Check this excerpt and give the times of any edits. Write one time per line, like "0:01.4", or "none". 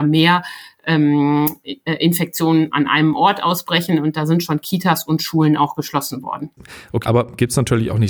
0:07.0